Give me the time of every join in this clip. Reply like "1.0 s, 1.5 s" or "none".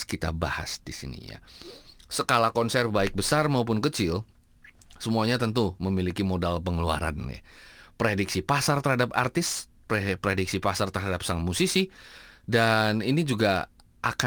2.0 s